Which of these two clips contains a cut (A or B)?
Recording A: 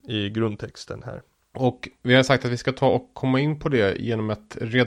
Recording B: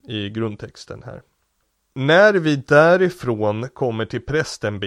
A